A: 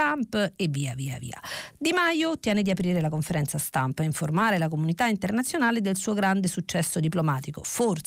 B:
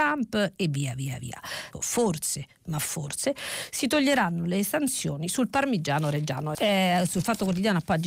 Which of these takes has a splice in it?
B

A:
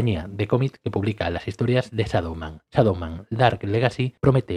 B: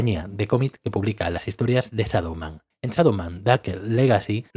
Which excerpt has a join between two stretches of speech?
A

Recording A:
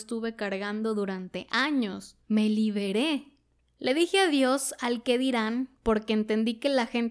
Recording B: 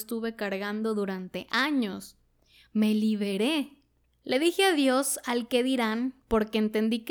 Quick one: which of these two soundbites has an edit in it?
A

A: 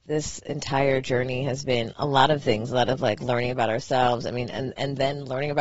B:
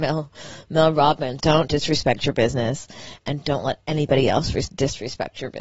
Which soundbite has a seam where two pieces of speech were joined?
B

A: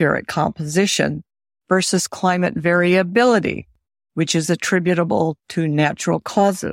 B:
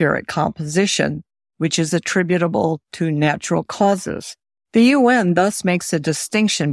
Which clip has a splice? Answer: B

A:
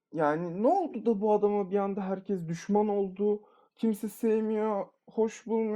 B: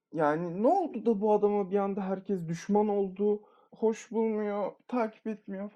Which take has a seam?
B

